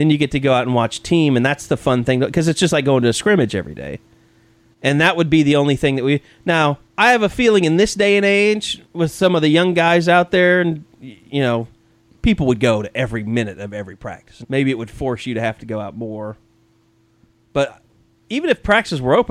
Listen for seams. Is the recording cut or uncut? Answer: cut